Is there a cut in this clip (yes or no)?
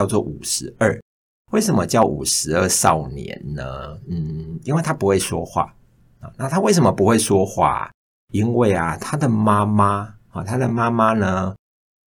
no